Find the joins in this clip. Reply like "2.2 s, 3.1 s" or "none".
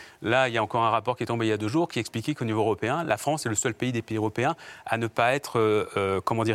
none

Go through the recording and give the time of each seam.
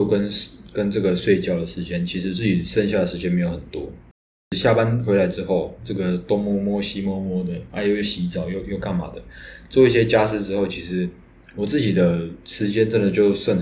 none

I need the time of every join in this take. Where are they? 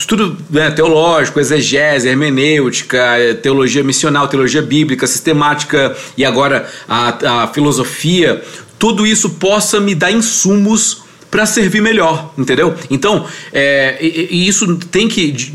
none

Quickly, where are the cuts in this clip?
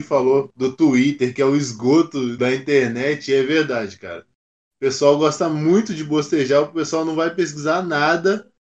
none

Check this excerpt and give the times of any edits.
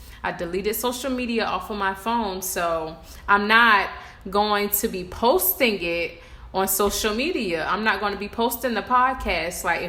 none

